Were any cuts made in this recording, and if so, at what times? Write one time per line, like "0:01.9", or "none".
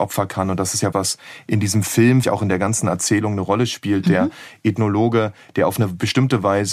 0:00.9
0:02.2